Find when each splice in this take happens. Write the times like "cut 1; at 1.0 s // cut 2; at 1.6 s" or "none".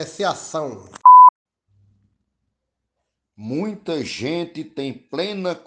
none